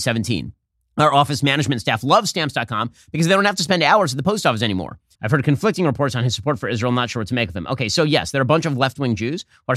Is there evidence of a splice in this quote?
yes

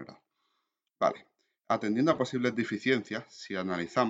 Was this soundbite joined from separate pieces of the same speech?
no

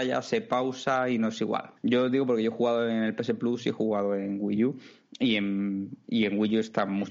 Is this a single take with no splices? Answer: no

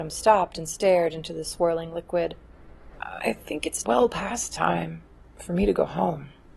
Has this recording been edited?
no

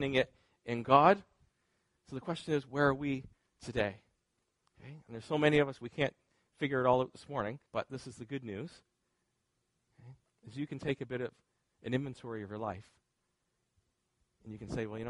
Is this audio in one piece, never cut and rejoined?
no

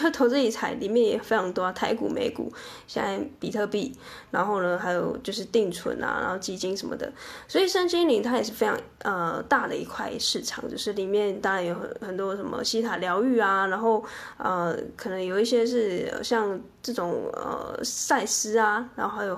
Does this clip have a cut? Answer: no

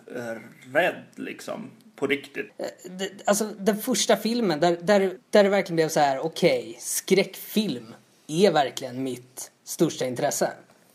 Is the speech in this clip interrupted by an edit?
yes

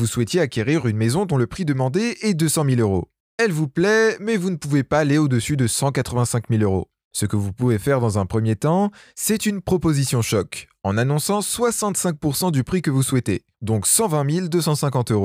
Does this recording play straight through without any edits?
yes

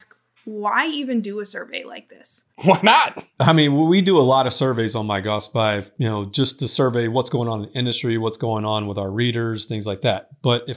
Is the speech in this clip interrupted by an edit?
yes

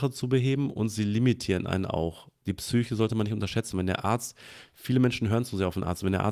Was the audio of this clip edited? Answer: no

